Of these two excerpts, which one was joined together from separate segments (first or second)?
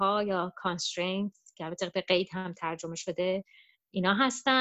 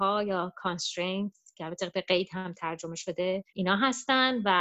second